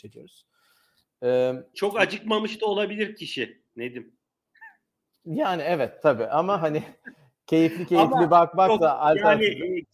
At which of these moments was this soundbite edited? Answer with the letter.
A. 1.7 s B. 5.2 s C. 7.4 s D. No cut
A